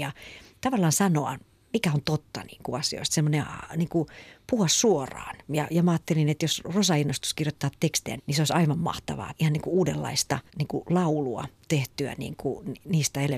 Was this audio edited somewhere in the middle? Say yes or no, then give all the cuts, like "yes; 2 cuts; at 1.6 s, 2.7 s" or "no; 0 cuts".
yes; 3 cuts; at 8.2 s, 9.3 s, 10.5 s